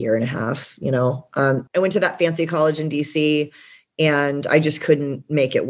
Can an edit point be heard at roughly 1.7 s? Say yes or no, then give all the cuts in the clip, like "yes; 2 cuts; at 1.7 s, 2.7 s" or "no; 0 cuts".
yes; 1 cut; at 1.7 s